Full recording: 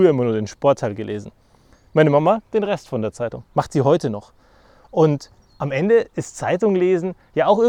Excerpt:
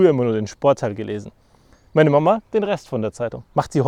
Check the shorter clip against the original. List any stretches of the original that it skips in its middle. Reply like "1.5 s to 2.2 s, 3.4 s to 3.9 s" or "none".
none